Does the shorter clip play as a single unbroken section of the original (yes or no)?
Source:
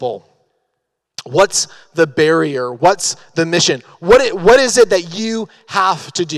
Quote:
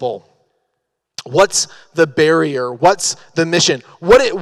yes